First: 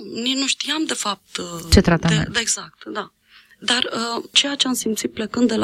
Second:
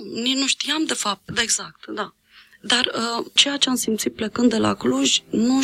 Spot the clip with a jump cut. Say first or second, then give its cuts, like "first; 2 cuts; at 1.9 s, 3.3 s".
second; 1 cut; at 1.3 s